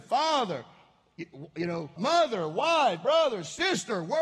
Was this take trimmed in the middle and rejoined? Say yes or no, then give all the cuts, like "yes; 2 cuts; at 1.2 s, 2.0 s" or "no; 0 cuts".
yes; 1 cut; at 2.0 s